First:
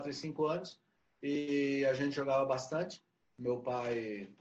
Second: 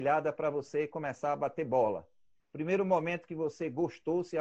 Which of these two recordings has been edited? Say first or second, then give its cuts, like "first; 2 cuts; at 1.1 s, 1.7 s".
second; 1 cut; at 2.4 s